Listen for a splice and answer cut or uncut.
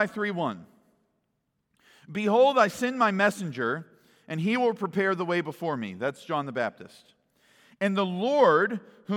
uncut